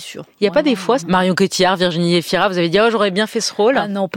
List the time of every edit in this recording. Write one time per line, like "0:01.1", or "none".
0:01.0